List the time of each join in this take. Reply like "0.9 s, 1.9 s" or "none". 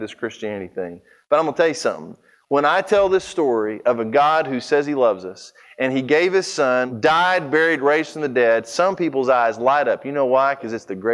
none